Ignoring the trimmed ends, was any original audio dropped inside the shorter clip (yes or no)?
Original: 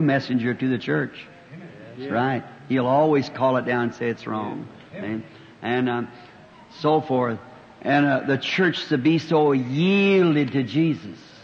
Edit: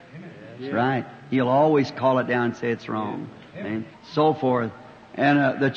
yes